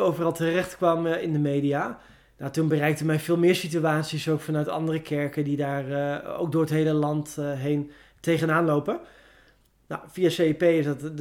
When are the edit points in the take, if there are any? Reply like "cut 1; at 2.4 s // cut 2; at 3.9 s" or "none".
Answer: none